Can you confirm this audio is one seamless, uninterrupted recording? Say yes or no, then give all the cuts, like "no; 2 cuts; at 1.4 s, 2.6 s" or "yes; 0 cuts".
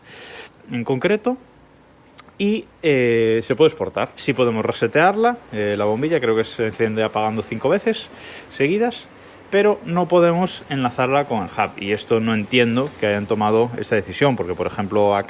no; 1 cut; at 4.2 s